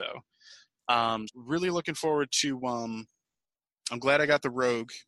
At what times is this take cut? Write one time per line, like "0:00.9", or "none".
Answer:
0:01.3